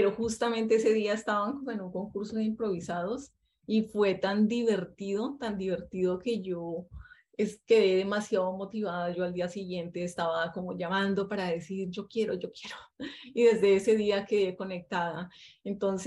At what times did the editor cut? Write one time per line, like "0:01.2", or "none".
none